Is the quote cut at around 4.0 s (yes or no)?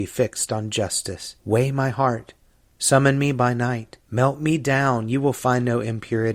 yes